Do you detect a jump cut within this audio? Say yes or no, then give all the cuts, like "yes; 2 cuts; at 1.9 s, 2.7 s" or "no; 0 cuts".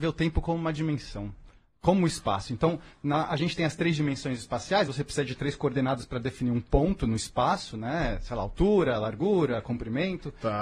no; 0 cuts